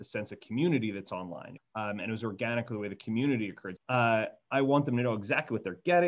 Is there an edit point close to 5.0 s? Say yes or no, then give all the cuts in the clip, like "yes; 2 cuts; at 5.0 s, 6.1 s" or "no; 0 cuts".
no; 2 cuts; at 1.6 s, 3.8 s